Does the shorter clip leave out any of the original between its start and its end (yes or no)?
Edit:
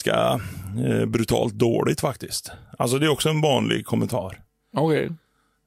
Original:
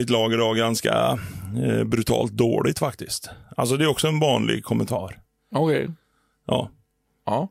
no